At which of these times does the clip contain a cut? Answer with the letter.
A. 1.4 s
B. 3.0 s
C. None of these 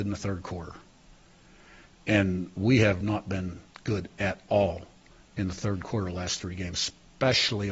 B